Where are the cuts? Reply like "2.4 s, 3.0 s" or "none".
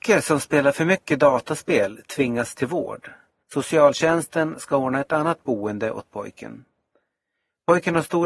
3.4 s